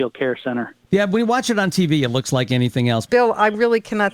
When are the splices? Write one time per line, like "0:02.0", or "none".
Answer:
0:03.1